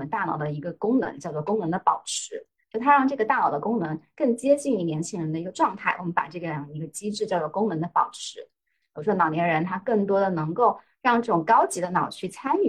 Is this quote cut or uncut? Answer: cut